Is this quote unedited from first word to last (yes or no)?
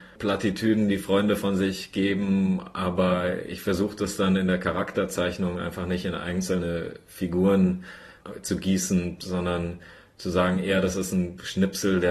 yes